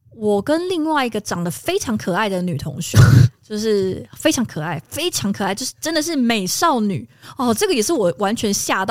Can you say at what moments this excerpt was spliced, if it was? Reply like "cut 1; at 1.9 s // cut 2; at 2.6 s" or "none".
none